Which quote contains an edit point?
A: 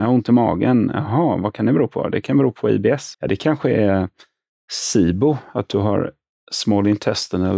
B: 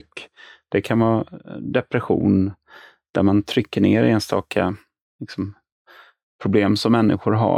A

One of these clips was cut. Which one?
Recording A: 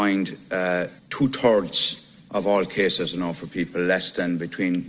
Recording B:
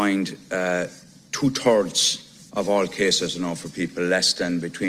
A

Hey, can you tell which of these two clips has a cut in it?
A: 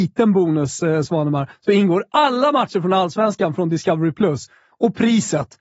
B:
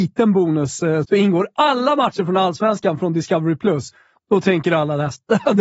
B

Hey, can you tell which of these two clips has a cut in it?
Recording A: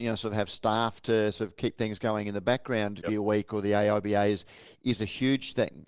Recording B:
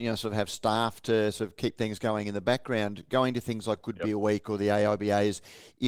A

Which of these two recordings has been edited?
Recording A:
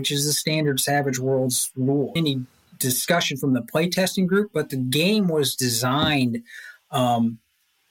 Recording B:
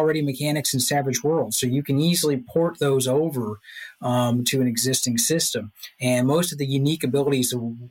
A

